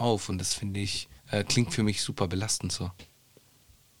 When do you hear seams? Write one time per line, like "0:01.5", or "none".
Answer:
0:01.2